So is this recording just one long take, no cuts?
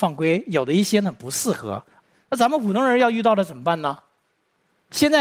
yes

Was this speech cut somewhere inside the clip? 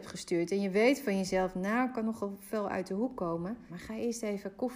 yes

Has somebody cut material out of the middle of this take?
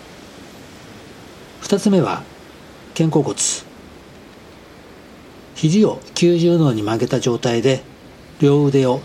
no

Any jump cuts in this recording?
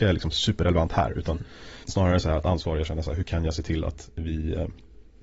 yes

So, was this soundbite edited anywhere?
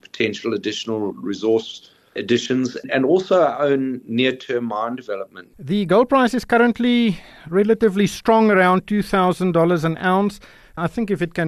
no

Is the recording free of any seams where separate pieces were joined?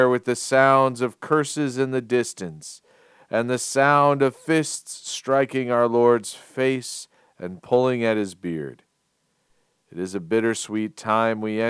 yes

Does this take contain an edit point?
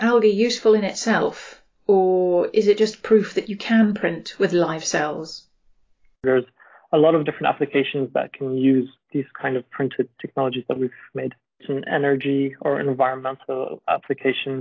no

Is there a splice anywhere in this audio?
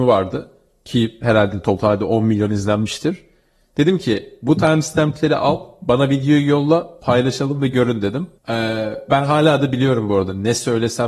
yes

